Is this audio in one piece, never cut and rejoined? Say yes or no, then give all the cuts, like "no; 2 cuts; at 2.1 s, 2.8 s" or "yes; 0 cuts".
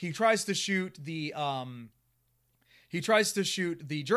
yes; 0 cuts